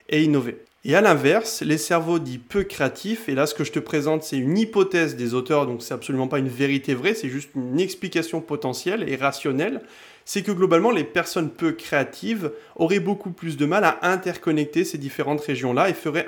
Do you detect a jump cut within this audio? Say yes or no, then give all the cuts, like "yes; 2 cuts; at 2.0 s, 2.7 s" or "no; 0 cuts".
no; 0 cuts